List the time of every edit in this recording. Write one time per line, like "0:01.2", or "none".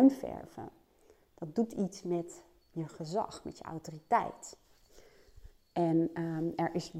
none